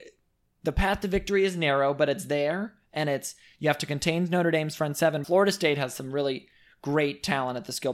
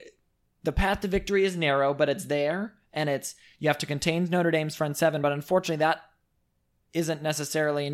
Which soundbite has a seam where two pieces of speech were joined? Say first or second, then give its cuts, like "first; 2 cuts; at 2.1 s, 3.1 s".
first; 1 cut; at 5.2 s